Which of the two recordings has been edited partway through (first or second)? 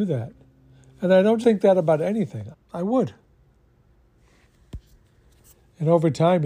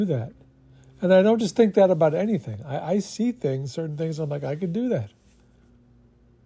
first